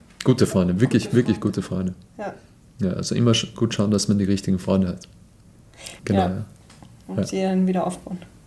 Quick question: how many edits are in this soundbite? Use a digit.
1